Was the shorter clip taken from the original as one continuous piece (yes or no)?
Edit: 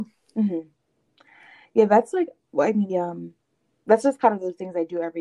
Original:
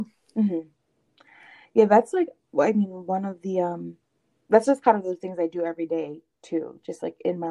no